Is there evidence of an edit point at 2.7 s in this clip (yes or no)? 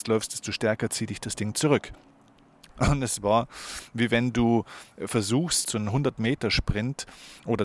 yes